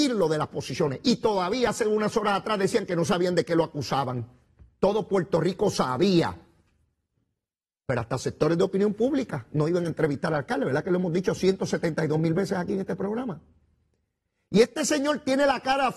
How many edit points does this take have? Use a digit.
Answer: 0